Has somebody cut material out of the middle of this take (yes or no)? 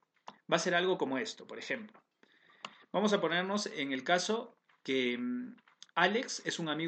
yes